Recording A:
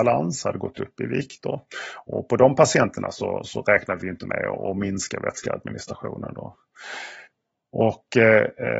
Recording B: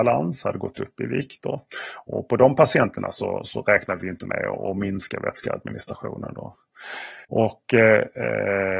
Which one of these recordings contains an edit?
B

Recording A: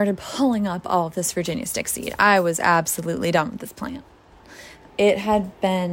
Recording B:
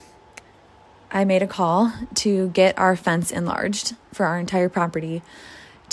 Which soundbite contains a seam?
A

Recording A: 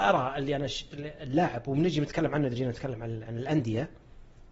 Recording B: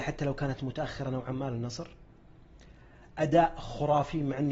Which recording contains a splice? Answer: A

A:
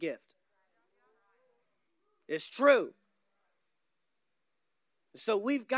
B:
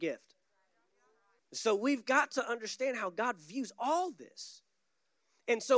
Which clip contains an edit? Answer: B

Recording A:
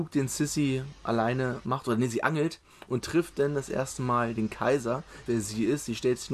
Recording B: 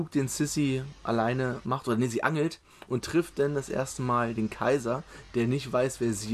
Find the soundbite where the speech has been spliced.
A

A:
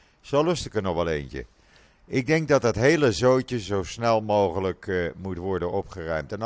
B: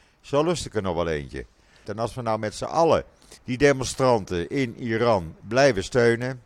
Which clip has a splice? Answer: B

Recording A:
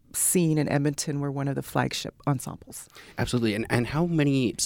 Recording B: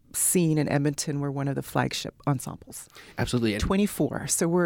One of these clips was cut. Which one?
B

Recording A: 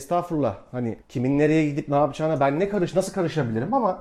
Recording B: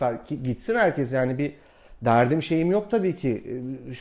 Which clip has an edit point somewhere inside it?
A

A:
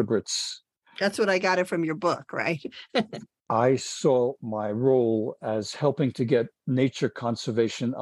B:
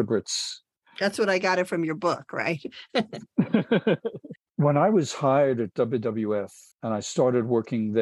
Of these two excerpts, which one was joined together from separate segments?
A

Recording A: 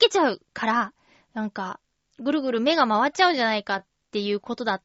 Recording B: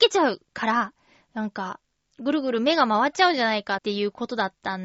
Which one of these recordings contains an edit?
B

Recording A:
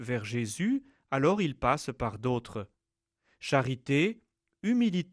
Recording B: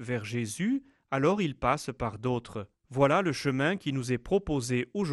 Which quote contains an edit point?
B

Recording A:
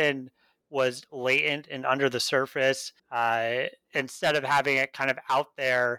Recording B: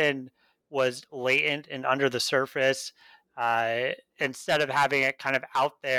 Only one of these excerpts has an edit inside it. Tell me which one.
A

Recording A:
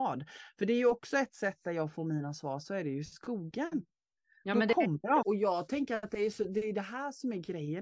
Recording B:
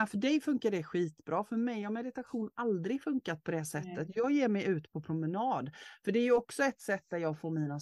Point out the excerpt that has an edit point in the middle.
A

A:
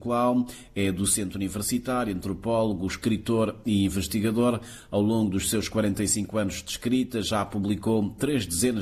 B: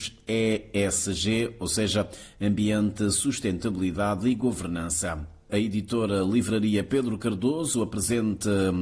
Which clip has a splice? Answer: B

